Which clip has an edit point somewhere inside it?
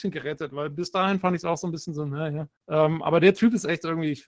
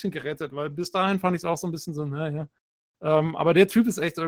first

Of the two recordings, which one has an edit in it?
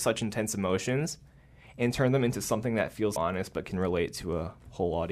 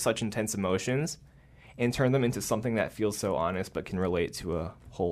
first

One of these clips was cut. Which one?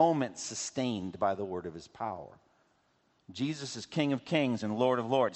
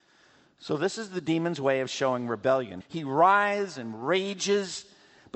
second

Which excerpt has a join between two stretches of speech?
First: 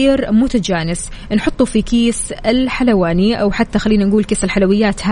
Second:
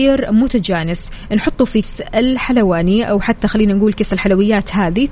second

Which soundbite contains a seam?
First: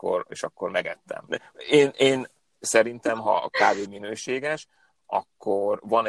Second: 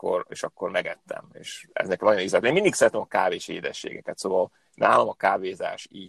first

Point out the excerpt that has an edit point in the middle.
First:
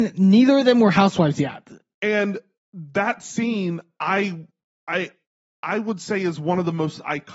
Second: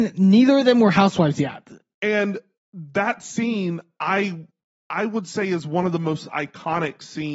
second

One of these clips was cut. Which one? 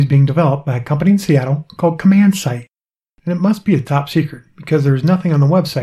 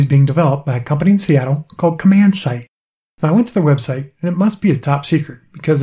first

